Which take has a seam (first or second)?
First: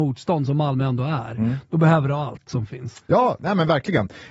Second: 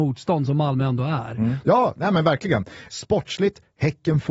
second